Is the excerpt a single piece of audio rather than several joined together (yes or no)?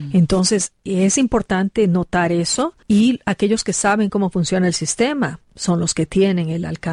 no